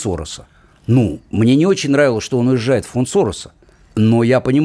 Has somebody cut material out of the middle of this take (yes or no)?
no